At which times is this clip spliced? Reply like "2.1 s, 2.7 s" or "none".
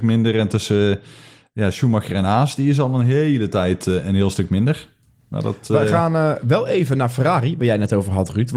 none